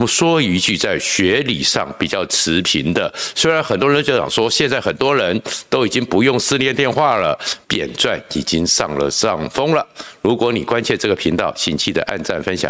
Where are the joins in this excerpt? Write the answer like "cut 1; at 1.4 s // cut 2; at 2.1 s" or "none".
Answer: cut 1; at 7.6 s